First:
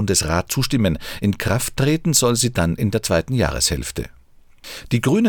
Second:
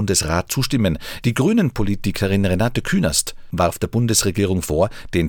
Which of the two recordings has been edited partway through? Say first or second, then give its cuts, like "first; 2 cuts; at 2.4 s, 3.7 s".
second; 1 cut; at 1.2 s